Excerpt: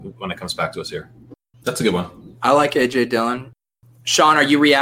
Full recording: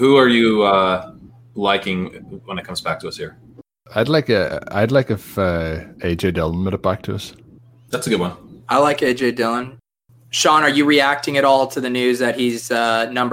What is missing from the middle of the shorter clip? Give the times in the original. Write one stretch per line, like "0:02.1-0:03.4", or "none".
0:03.8-0:07.8